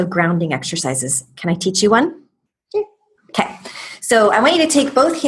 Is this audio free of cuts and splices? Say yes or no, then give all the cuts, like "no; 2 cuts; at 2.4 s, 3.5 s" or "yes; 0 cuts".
yes; 0 cuts